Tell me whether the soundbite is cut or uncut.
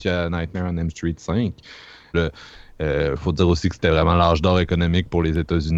cut